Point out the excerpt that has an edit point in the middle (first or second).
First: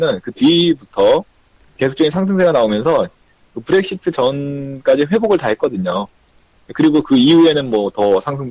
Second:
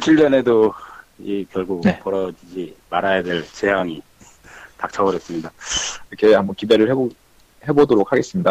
second